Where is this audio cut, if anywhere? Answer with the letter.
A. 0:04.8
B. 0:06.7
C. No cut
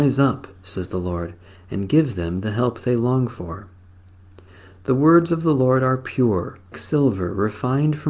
B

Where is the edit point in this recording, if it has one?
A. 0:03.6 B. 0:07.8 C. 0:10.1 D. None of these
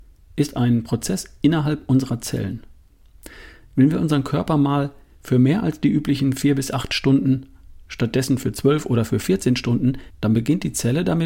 C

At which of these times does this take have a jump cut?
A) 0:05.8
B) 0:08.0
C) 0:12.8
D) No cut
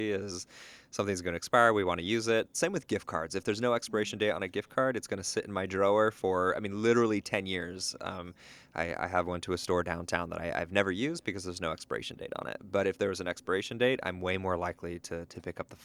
D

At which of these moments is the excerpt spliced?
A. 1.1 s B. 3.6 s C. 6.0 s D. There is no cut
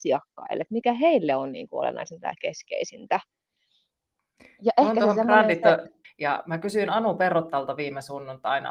C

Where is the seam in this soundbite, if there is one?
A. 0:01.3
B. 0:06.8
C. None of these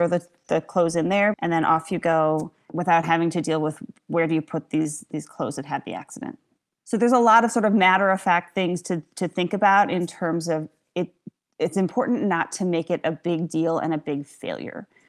A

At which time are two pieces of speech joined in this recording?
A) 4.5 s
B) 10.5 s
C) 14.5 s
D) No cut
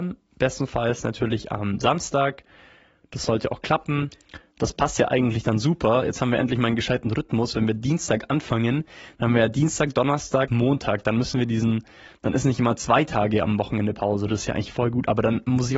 B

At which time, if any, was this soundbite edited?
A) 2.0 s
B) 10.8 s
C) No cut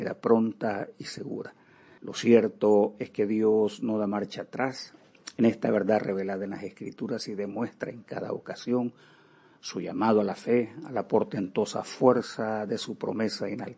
A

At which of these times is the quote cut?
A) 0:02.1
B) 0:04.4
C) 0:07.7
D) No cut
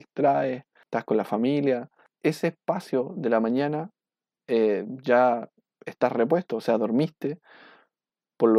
A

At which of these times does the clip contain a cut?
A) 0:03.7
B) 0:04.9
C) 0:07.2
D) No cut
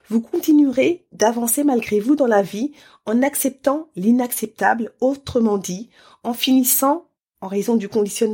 D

